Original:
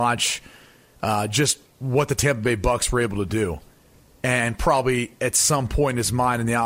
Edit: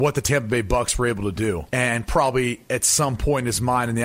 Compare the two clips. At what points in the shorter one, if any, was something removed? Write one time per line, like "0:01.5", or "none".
0:01.7